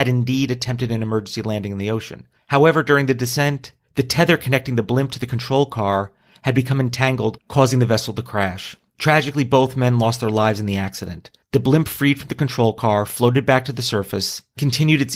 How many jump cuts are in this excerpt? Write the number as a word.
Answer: zero